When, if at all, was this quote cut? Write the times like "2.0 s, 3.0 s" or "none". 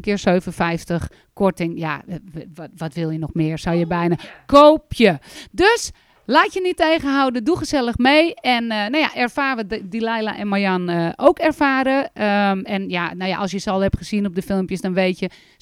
none